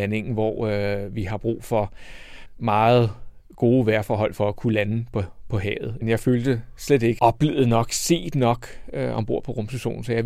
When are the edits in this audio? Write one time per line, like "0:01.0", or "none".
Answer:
0:06.0
0:07.2

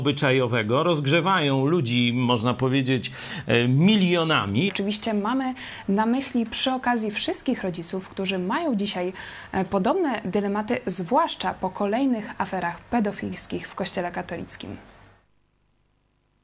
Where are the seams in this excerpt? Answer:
0:04.7

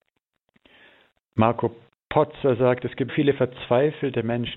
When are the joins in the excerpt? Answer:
0:03.1

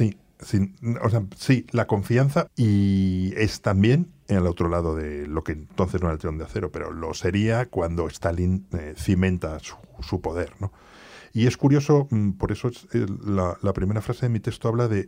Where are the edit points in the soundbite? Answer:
0:02.5

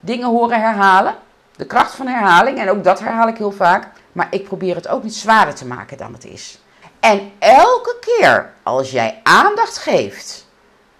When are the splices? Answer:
0:04.0
0:06.8

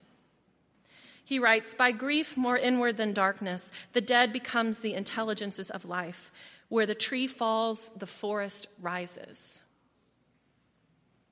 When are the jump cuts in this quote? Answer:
none

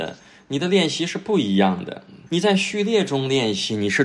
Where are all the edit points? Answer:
0:02.3

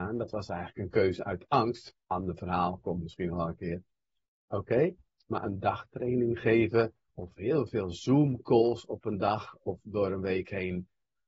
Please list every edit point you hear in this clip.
0:02.0
0:04.5

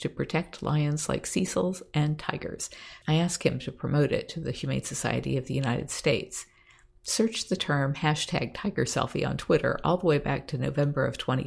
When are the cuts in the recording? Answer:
0:03.0

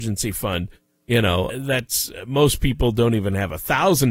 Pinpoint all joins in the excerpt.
0:01.5

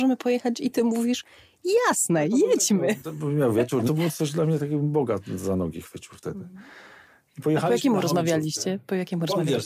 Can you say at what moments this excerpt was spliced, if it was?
0:03.9

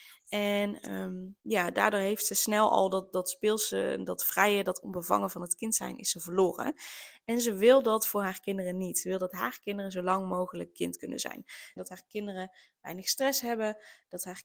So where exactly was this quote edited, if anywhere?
0:01.4
0:11.8

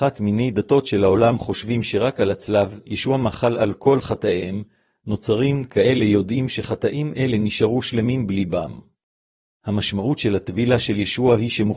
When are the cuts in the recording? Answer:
0:09.6

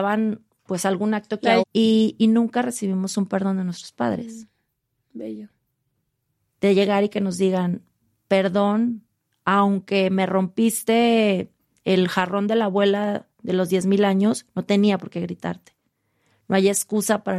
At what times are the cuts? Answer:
0:01.6

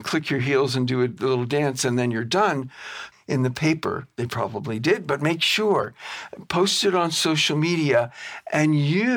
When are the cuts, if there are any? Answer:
0:03.1

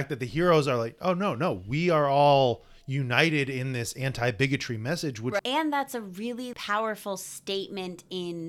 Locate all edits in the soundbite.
0:05.4
0:06.5

